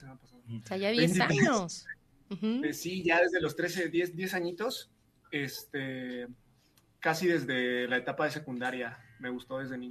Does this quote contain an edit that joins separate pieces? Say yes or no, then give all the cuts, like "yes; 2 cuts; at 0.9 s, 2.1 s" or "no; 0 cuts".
no; 0 cuts